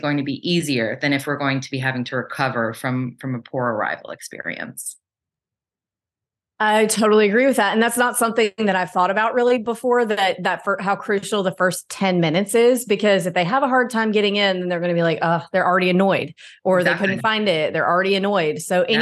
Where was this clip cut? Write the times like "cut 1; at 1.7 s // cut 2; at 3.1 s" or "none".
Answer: none